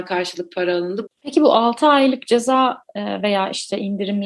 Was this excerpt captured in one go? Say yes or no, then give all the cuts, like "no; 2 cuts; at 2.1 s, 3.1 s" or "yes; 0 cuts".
no; 1 cut; at 1.1 s